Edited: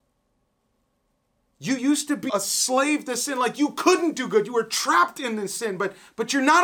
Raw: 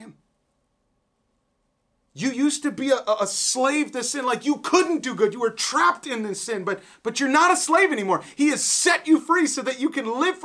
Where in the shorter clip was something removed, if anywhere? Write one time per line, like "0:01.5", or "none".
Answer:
0:02.3